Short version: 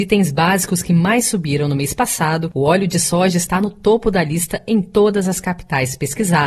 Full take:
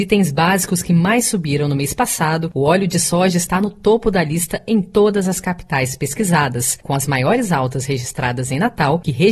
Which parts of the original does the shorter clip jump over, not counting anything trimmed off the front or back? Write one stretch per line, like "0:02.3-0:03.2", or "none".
none